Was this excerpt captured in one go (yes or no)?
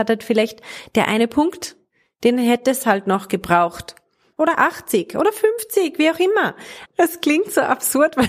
no